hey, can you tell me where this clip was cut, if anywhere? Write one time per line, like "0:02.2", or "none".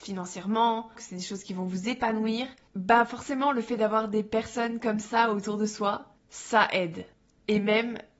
0:01.0